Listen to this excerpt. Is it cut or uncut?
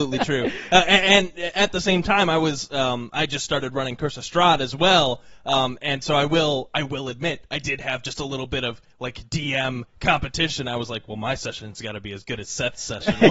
uncut